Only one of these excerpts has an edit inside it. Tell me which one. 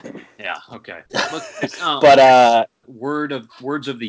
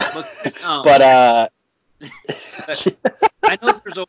first; 2 cuts; at 1.1 s, 2.8 s

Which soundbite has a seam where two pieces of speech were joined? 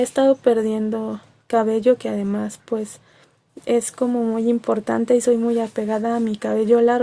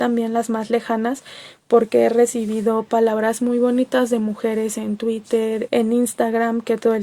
second; 1 cut; at 5.7 s

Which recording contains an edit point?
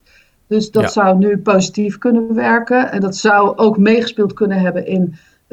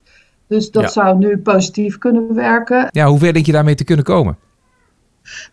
second; 1 cut; at 2.9 s

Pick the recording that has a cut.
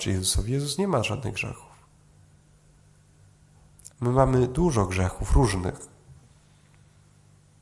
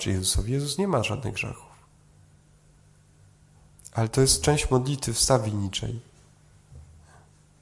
first; 1 cut; at 3.9 s

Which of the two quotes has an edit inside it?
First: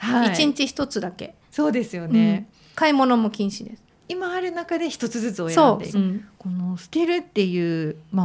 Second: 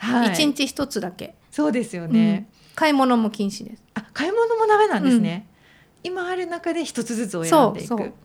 first; 2 cuts; at 3.9 s, 5.9 s

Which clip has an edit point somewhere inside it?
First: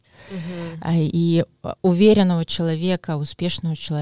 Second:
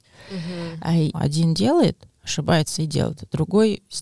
second; 1 cut; at 1.1 s

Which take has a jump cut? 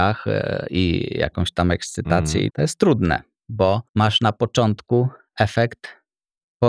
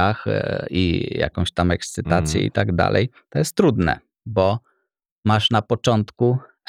first; 2 cuts; at 2.5 s, 3.9 s

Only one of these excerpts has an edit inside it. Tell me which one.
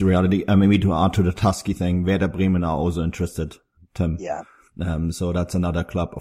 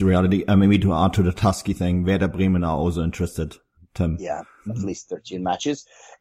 second; 1 cut; at 4.7 s

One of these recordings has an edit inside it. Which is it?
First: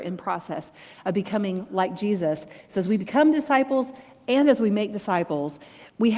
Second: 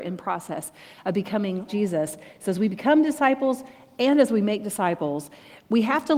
second; 1 cut; at 1.7 s

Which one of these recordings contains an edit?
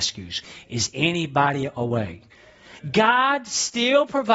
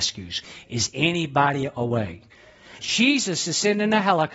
second; 1 cut; at 2.8 s

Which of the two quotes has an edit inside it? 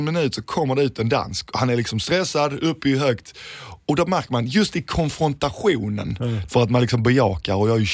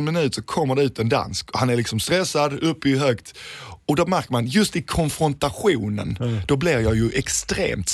first; 1 cut; at 6.5 s

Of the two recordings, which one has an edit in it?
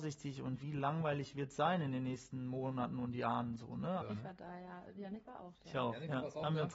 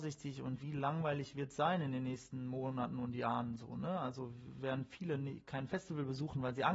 first; 1 cut; at 4.0 s

